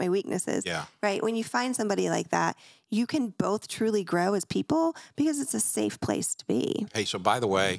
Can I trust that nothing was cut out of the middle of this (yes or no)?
yes